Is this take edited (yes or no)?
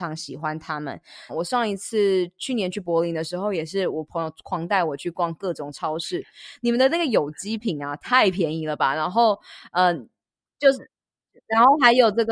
yes